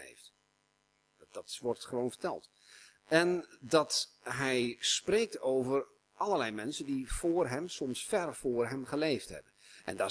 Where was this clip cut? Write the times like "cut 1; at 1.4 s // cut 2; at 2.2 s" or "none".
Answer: none